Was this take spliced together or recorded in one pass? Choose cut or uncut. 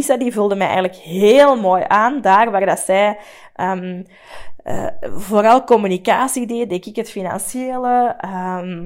uncut